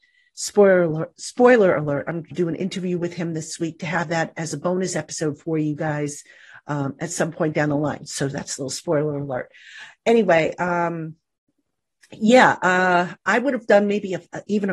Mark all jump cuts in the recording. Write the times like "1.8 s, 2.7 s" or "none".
2.3 s